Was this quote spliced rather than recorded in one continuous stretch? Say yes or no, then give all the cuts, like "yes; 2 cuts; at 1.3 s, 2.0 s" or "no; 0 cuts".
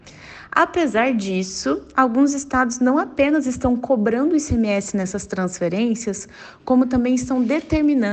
no; 0 cuts